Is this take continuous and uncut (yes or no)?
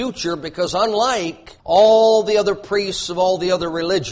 no